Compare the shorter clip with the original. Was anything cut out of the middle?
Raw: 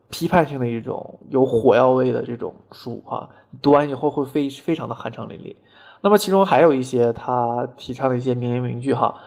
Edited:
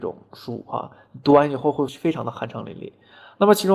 yes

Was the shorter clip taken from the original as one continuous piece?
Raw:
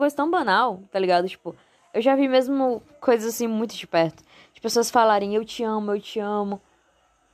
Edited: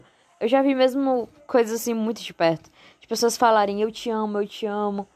yes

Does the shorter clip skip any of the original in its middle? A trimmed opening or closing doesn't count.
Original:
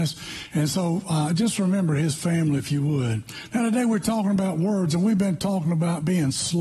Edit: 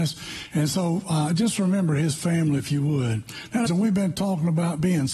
yes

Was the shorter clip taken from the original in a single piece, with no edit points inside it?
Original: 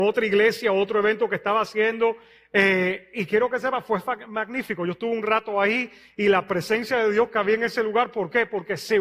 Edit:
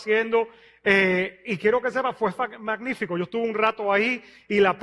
yes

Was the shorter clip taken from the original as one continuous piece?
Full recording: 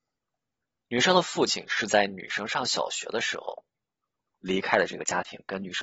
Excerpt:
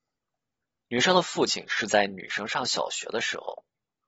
yes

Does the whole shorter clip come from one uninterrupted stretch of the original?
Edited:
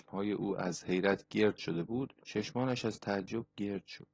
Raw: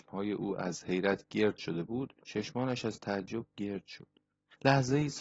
yes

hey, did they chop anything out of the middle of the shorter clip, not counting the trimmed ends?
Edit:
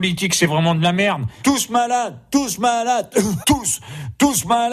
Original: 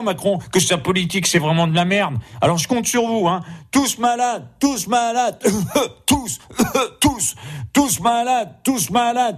yes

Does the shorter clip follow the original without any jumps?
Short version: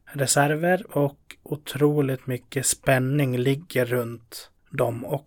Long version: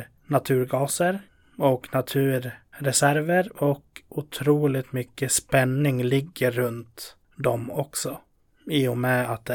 yes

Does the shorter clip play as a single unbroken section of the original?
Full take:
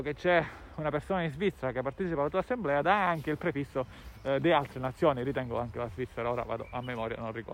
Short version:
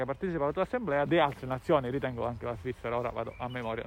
no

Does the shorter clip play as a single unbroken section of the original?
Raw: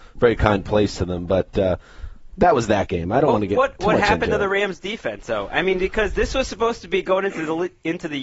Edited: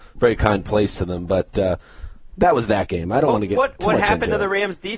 yes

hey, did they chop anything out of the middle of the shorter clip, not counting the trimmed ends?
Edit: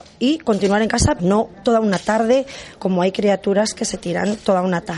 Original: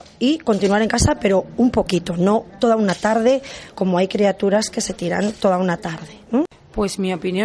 yes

